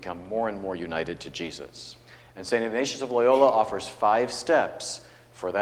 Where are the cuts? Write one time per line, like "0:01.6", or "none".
none